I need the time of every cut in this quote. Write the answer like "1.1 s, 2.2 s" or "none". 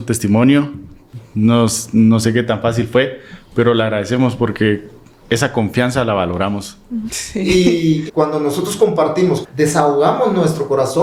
7.1 s, 8.1 s, 9.4 s